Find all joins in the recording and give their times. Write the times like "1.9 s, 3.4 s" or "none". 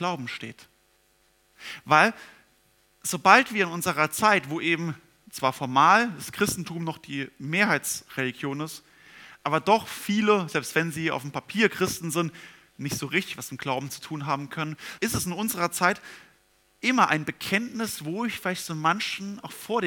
15.0 s